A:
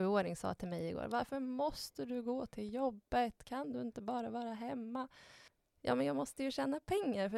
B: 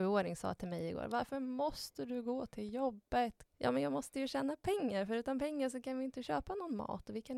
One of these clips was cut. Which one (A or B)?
B